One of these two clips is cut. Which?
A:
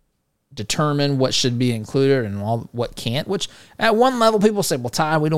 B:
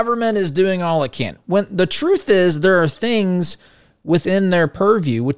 B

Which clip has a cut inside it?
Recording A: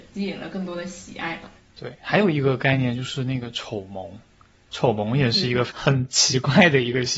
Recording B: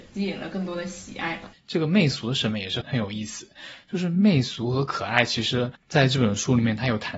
B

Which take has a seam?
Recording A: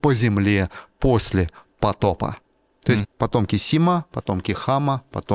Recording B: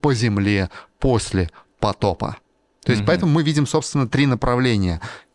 A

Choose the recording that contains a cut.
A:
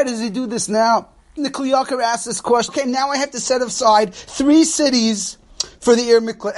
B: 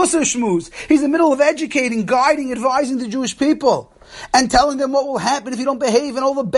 A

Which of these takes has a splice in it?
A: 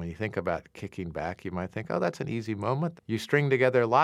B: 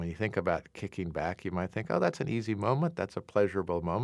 A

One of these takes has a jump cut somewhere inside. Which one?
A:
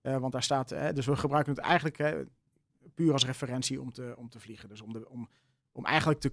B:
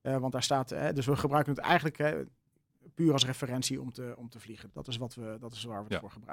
B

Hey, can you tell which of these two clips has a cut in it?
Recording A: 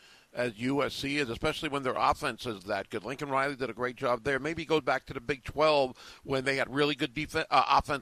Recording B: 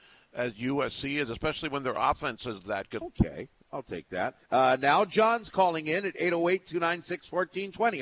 B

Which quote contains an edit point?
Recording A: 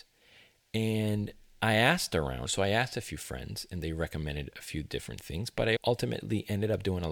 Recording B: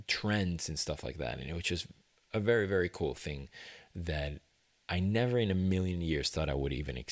A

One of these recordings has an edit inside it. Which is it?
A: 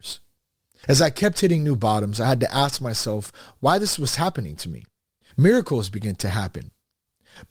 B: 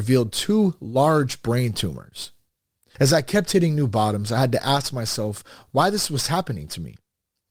A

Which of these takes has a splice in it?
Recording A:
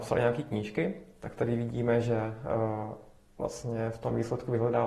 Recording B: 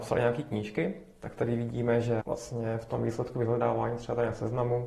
B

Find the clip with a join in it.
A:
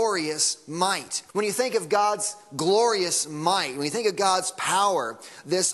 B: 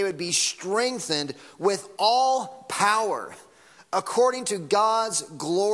A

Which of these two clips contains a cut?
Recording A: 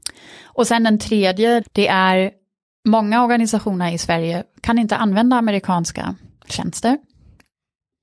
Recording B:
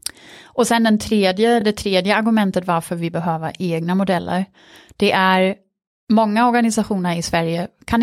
A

